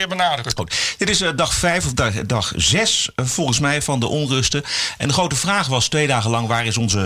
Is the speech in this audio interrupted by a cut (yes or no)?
no